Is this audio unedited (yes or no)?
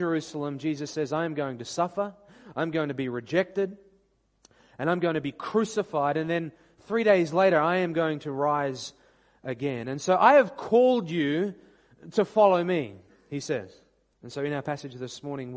no